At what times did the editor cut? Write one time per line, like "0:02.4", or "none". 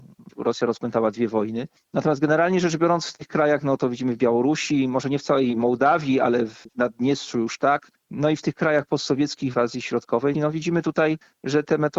0:10.3